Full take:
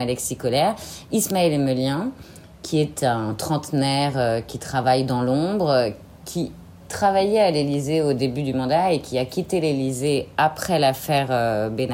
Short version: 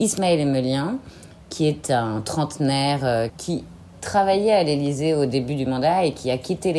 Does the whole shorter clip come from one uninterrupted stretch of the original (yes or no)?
no